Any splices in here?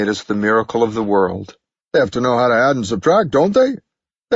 yes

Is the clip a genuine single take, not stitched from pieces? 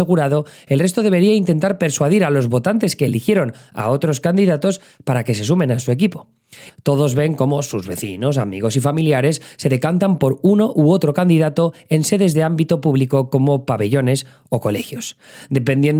no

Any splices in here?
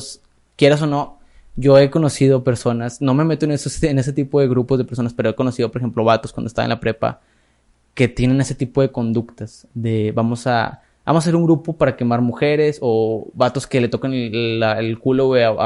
no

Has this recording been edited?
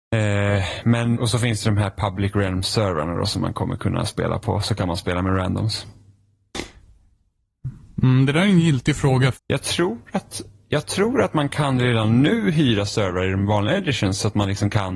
yes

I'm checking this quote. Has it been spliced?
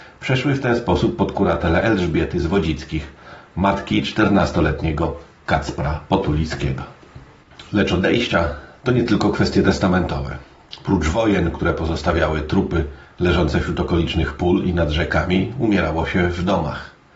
no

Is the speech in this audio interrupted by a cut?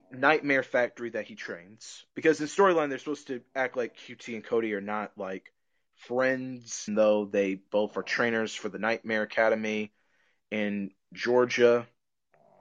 yes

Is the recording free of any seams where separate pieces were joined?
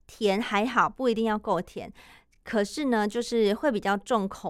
yes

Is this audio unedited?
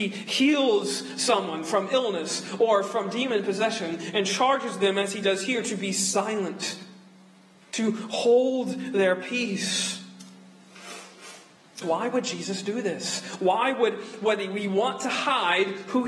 no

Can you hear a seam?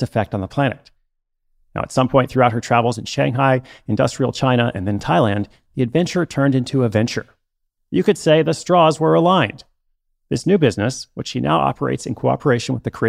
no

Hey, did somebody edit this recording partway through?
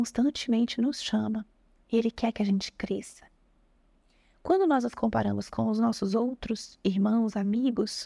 no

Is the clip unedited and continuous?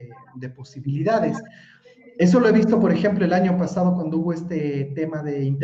yes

